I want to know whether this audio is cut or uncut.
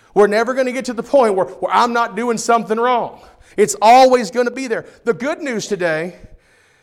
uncut